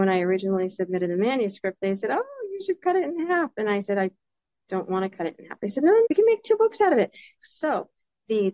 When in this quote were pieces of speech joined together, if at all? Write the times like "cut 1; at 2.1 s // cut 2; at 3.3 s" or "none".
cut 1; at 6.0 s // cut 2; at 7.4 s